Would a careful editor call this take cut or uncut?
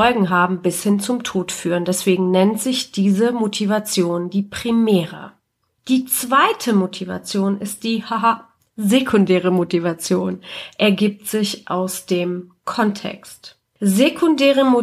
uncut